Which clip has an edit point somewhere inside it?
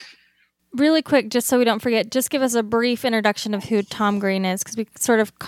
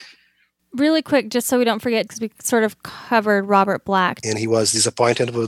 second; 2 cuts; at 2.1 s, 4.2 s

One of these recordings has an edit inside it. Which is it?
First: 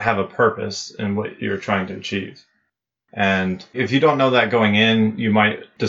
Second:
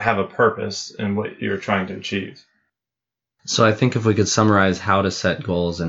first; 1 cut; at 3.1 s

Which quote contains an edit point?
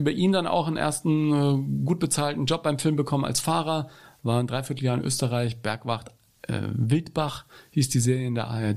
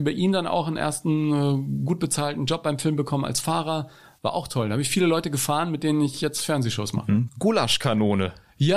second; 2 cuts; at 4.2 s, 7.3 s

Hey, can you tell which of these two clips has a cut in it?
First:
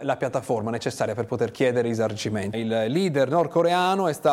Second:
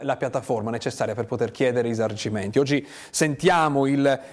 first; 1 cut; at 2.5 s

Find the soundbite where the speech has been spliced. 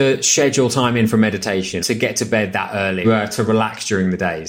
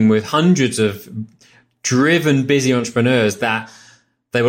first; 2 cuts; at 1.8 s, 3.0 s

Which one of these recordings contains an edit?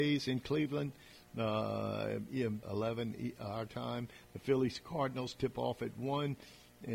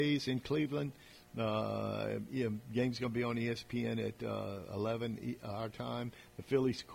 first; 1 cut; at 2.6 s

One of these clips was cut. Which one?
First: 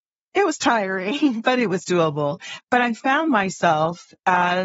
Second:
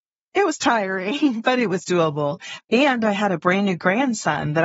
second; 1 cut; at 2.6 s

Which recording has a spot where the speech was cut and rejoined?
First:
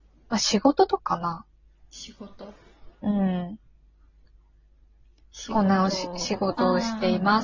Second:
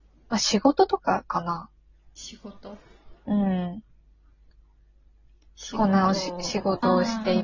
first; 1 cut; at 1.0 s

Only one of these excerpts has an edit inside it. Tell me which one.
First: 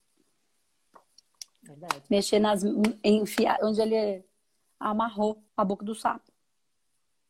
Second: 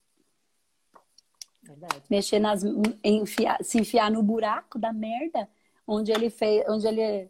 first; 2 cuts; at 3.6 s, 5.5 s

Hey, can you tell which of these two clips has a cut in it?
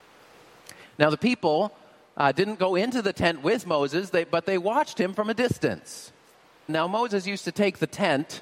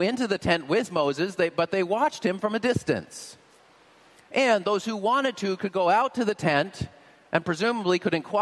first; 1 cut; at 6.7 s

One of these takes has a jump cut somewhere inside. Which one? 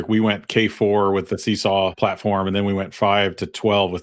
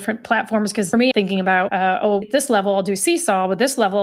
second; 2 cuts; at 1.1 s, 2.2 s

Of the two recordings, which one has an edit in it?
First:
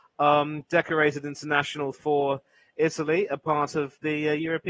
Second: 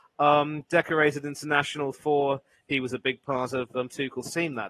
second; 1 cut; at 2.5 s

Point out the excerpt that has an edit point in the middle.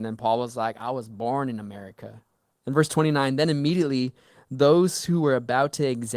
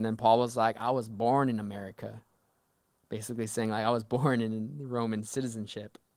first; 1 cut; at 2.5 s

